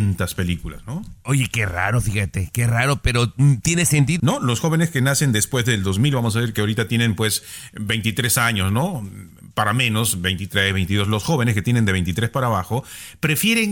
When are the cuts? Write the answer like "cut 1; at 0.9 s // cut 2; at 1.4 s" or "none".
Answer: cut 1; at 4.2 s